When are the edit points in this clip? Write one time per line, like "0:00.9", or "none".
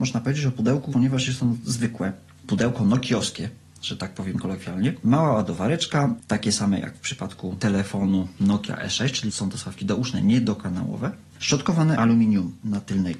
0:06.2
0:11.3